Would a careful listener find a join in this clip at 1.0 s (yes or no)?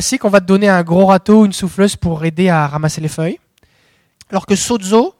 no